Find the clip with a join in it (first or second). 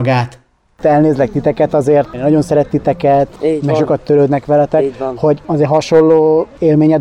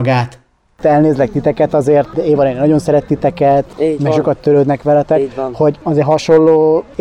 first